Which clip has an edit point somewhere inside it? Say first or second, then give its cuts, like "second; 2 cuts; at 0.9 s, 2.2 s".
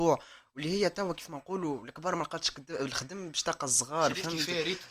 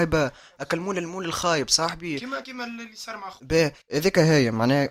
second; 1 cut; at 2.4 s